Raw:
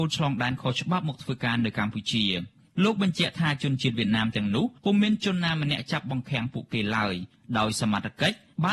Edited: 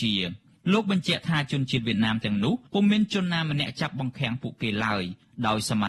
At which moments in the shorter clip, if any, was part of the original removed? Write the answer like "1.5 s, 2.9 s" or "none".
none